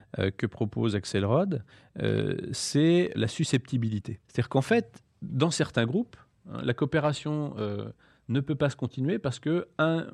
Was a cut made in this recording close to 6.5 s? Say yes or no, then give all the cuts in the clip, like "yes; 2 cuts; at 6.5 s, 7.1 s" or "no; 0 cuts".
no; 2 cuts; at 3.1 s, 4.2 s